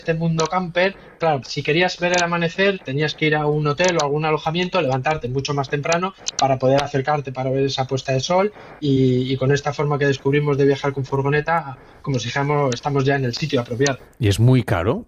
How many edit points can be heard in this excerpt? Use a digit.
1